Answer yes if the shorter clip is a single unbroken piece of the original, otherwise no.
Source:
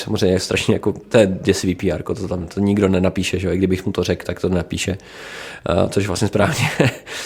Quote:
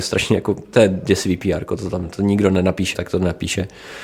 no